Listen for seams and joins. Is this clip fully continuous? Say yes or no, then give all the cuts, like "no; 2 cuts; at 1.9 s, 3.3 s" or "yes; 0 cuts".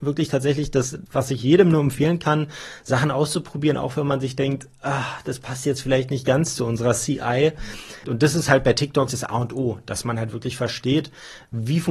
no; 3 cuts; at 1.1 s, 8.0 s, 9.1 s